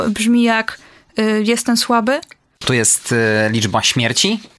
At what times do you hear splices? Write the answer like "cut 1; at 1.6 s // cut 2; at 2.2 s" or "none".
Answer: cut 1; at 2.6 s